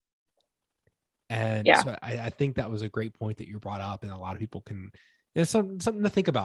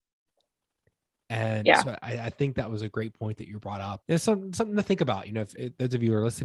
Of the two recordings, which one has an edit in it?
second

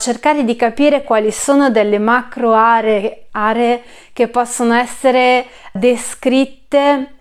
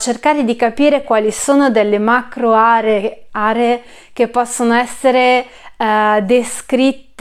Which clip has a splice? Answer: first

